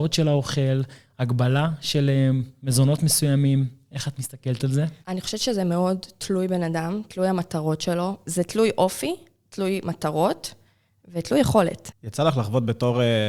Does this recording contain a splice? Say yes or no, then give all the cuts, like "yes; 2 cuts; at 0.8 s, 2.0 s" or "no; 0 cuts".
yes; 2 cuts; at 5.0 s, 8.3 s